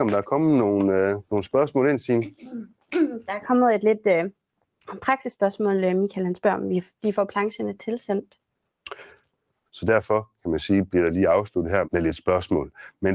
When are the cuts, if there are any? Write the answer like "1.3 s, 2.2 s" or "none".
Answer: 1.3 s, 9.7 s, 11.8 s